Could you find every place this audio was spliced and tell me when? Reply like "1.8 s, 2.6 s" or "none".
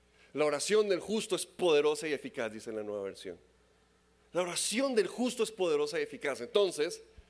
none